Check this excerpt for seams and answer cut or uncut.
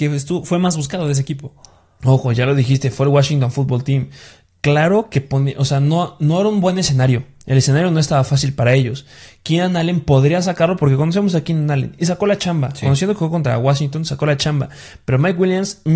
uncut